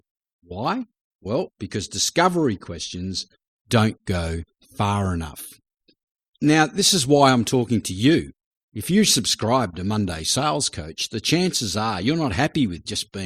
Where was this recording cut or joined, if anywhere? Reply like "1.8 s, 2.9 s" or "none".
none